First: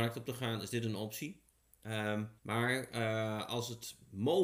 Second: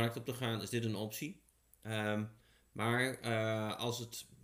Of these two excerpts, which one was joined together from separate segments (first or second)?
first